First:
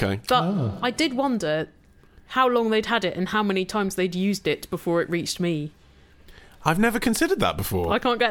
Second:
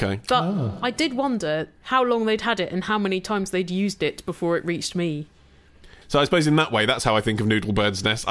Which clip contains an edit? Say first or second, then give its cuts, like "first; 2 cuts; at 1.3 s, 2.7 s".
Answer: second; 2 cuts; at 1.8 s, 6.0 s